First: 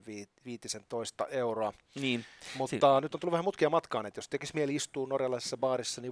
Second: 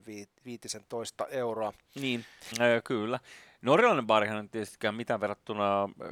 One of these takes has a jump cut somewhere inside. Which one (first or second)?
second